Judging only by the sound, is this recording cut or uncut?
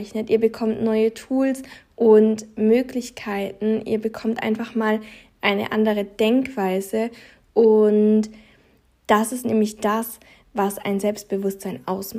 uncut